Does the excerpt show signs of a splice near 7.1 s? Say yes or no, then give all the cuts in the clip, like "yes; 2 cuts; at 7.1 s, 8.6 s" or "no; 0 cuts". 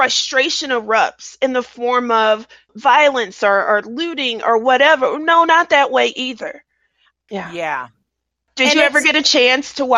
yes; 1 cut; at 7.1 s